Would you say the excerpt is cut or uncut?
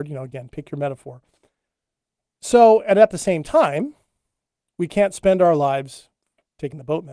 uncut